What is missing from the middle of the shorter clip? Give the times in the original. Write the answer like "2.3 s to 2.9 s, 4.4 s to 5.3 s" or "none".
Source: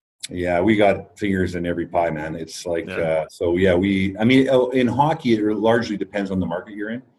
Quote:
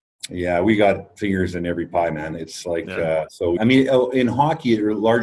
3.6 s to 4.2 s